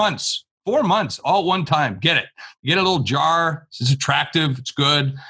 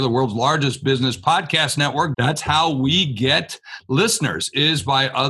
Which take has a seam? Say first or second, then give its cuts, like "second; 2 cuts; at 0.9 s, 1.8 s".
second; 1 cut; at 2.1 s